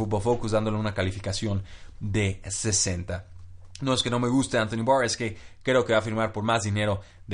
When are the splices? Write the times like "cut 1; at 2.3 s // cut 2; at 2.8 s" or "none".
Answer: none